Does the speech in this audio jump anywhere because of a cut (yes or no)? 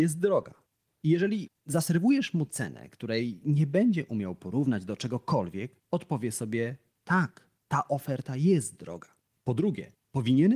yes